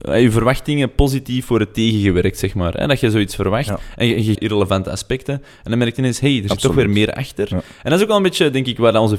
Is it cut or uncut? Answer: cut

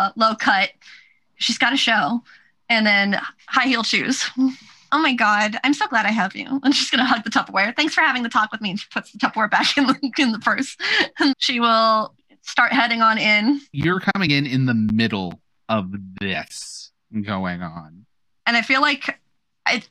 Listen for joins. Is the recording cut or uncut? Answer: cut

